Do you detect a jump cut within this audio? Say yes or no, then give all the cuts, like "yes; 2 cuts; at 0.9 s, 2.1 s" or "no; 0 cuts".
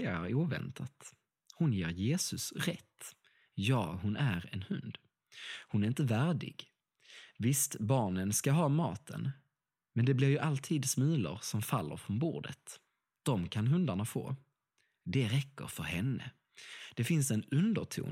no; 0 cuts